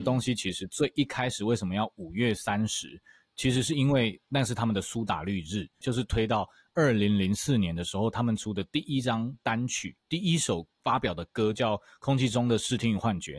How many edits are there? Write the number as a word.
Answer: one